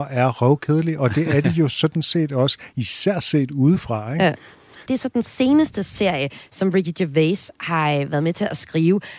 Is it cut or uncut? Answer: cut